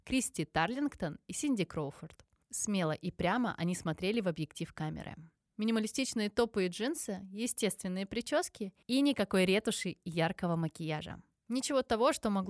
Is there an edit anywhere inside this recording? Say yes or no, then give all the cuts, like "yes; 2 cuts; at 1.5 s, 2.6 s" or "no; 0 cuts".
no; 0 cuts